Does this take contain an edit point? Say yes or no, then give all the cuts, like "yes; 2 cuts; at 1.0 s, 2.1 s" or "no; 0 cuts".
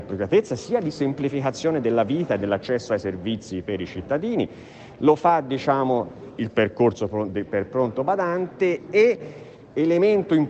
yes; 1 cut; at 6.4 s